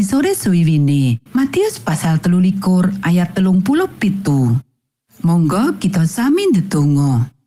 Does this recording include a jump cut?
yes; 1 cut; at 1.3 s

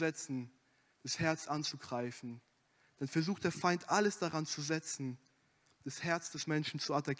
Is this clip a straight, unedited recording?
yes; 0 cuts

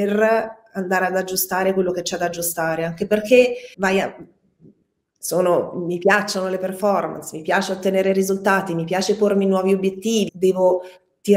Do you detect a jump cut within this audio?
yes; 2 cuts; at 3.7 s, 10.3 s

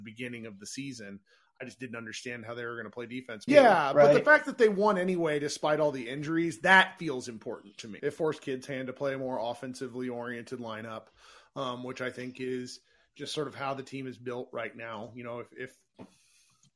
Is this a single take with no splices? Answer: no; 2 cuts; at 3.5 s, 8.0 s

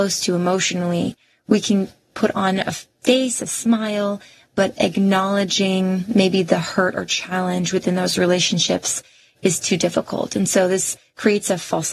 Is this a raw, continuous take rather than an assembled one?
yes; 0 cuts

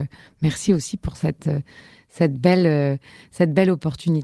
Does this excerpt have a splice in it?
no; 0 cuts

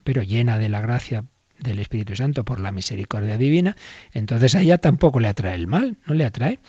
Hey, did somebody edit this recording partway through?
no; 0 cuts

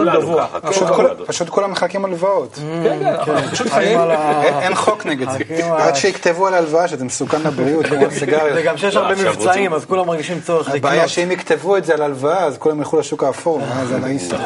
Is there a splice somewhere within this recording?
no; 0 cuts

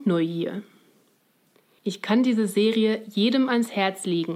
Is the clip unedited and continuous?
no; 1 cut; at 1.8 s

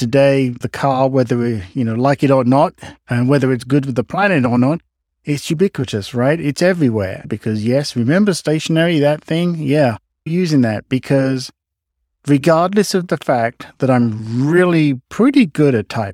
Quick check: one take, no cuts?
no; 2 cuts; at 7.2 s, 10.3 s

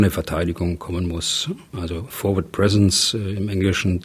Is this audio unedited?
no; 1 cut; at 2.1 s

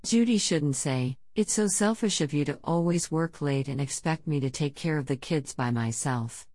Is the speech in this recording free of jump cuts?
yes; 0 cuts

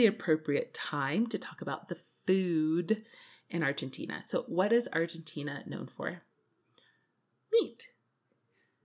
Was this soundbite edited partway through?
no; 0 cuts

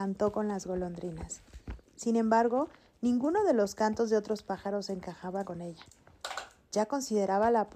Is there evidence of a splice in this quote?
yes; 1 cut; at 5.4 s

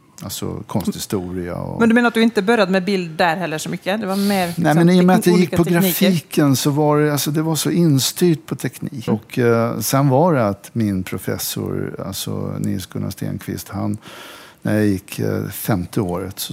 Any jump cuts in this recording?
yes; 1 cut; at 9.1 s

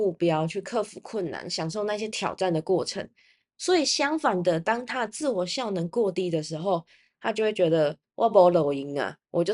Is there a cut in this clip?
no; 0 cuts

